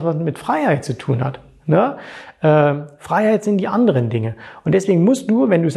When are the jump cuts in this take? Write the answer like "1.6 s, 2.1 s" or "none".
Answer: none